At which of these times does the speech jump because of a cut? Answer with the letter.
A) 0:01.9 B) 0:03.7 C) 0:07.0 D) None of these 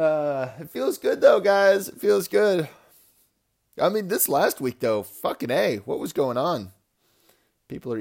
D